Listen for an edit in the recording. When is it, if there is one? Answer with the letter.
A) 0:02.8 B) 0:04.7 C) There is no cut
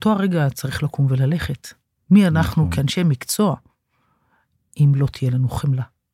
C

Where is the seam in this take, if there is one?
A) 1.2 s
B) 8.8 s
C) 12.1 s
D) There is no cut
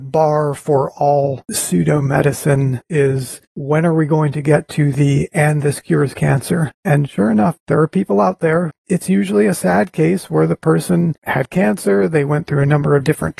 B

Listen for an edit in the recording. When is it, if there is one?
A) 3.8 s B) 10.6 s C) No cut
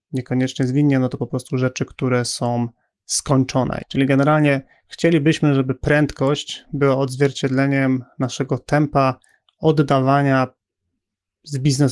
A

